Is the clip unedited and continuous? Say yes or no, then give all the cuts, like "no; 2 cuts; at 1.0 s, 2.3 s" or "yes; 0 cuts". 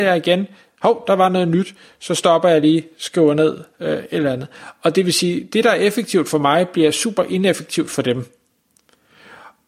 yes; 0 cuts